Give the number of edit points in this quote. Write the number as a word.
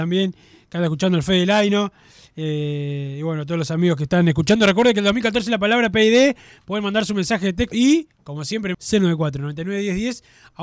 two